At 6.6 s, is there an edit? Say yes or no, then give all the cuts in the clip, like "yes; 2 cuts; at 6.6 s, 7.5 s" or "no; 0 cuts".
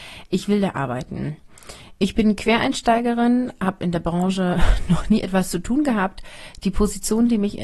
no; 0 cuts